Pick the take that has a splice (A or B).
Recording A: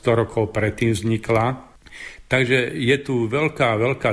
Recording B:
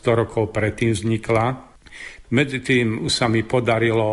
B